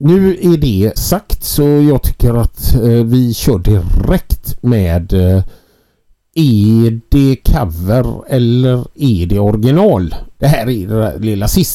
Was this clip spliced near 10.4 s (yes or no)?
yes